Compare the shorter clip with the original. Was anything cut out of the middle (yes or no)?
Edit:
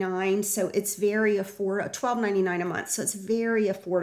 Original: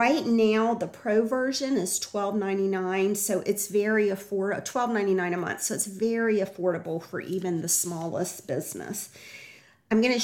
no